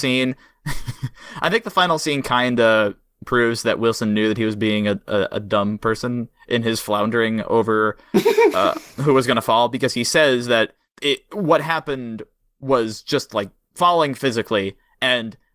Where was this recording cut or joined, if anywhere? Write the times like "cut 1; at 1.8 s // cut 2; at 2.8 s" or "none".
cut 1; at 13.7 s